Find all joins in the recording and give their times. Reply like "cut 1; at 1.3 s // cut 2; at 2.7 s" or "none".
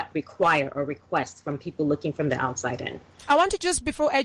cut 1; at 3.3 s